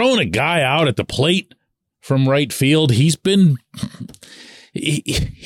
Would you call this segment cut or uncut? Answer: uncut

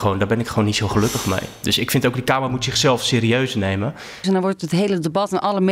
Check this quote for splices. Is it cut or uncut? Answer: cut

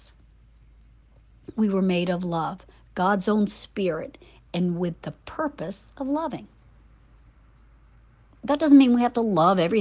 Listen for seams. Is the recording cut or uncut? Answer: uncut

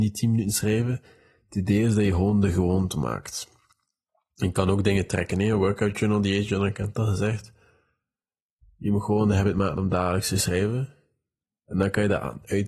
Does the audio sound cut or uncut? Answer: uncut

